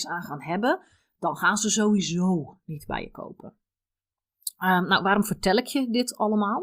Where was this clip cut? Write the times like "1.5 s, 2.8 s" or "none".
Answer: none